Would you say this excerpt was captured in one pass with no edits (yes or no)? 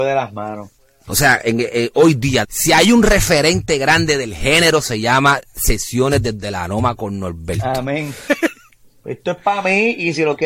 no